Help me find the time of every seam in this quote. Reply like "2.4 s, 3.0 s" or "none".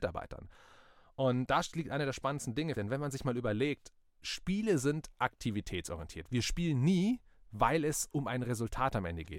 2.7 s, 6.3 s

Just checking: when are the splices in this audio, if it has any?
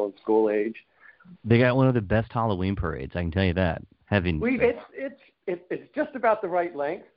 1.3 s, 4.6 s

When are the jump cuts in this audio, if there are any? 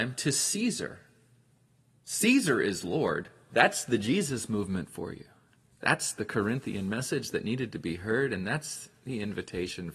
3.5 s

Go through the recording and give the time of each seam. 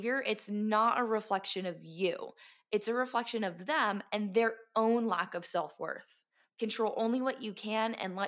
6.5 s

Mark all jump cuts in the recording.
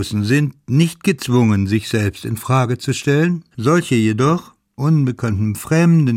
3.5 s, 4.8 s

